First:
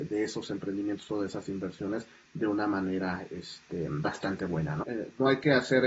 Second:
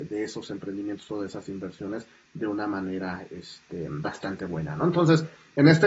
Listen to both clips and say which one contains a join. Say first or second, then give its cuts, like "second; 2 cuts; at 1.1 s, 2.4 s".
first; 1 cut; at 4.8 s